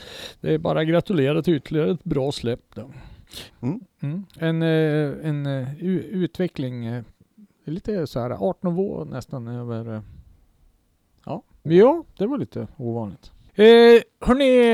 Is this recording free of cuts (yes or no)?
no